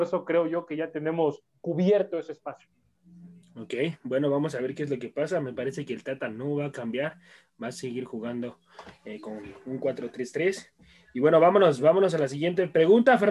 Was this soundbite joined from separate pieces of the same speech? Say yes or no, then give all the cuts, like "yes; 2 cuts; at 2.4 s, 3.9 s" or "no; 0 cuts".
no; 0 cuts